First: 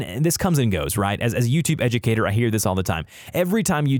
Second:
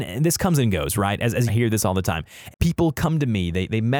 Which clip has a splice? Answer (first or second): second